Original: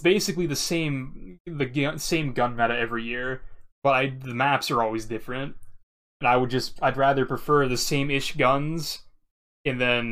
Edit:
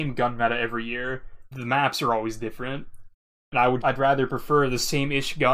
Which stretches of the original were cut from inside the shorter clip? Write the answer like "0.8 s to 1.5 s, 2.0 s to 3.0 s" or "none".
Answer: 3.7 s to 4.2 s, 6.5 s to 6.8 s